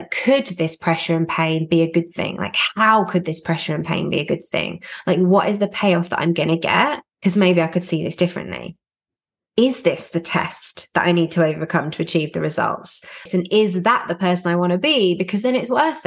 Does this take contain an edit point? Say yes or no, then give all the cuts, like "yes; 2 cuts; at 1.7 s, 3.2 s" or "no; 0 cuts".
yes; 2 cuts; at 7.1 s, 13.3 s